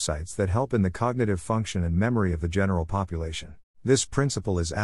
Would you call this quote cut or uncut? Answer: cut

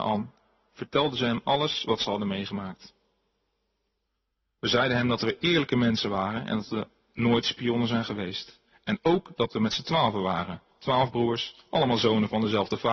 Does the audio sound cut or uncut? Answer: cut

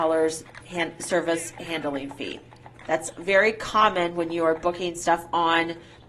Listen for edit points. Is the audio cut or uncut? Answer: uncut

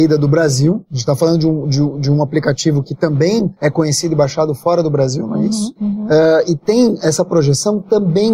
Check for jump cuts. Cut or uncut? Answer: uncut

